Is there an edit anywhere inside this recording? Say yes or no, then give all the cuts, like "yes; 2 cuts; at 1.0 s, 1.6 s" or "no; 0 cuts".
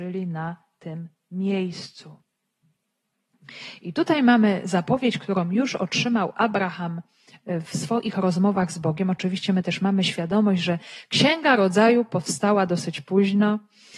no; 0 cuts